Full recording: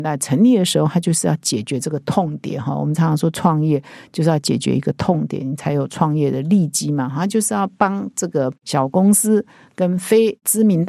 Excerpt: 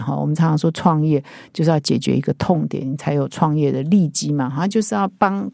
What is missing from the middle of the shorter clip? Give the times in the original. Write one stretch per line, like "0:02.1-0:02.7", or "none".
none